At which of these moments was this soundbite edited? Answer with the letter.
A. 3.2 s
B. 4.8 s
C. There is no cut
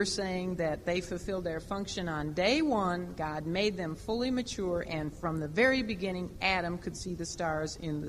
C